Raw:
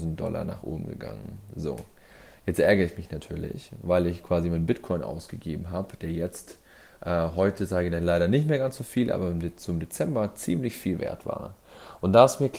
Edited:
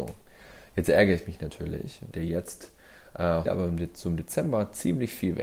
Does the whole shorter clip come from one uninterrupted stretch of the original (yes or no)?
no